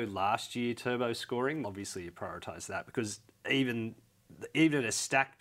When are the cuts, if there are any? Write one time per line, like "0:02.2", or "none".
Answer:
0:01.6

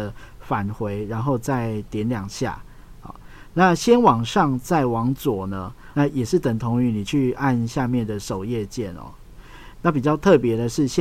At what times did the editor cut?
0:05.9

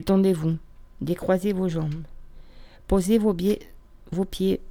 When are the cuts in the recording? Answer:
none

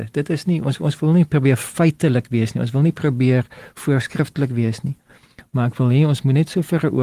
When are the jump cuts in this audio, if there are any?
none

